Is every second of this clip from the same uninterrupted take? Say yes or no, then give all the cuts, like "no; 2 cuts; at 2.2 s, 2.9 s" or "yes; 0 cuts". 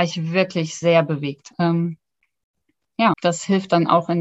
no; 2 cuts; at 1.5 s, 3.1 s